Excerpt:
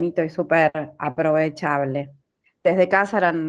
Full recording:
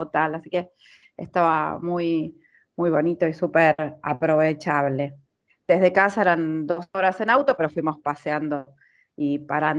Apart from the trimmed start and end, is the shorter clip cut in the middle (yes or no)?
no